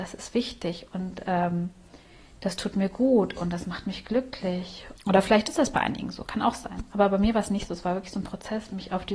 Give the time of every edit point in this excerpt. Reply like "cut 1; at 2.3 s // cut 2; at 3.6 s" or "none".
cut 1; at 5.0 s